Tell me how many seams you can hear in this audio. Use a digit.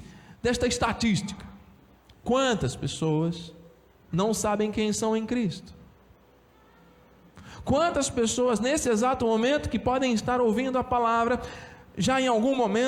0